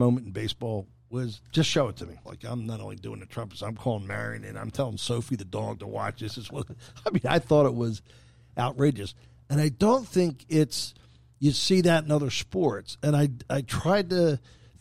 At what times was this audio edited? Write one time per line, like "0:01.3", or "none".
0:02.3